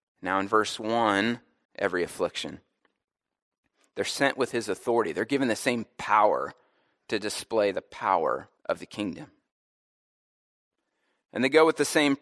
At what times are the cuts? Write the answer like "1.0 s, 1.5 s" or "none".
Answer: 1.7 s, 8.6 s